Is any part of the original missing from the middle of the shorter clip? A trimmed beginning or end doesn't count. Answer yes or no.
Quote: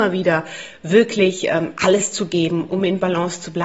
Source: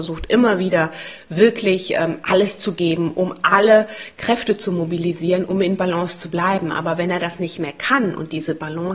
yes